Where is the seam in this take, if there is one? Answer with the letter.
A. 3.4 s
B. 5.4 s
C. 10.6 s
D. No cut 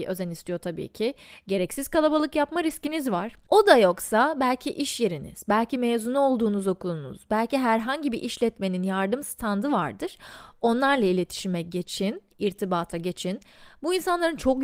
A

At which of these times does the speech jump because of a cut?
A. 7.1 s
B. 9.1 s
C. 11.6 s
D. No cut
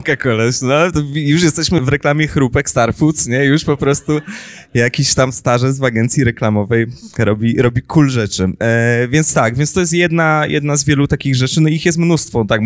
D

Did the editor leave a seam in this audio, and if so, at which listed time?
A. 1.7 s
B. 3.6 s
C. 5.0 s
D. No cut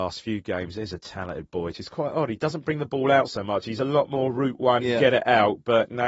A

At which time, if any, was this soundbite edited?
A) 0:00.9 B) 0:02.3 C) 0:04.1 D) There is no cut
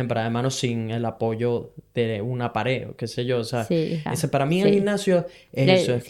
C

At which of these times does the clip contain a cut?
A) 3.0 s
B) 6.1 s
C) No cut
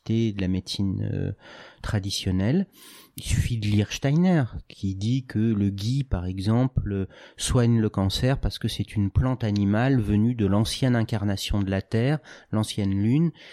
C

